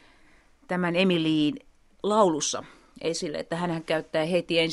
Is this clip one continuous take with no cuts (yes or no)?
yes